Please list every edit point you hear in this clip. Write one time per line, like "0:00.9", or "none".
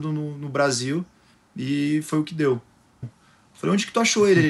0:03.0